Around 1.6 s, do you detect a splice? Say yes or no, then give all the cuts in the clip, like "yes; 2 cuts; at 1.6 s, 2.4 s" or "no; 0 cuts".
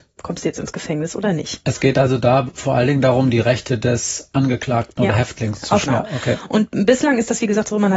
no; 1 cut; at 5.9 s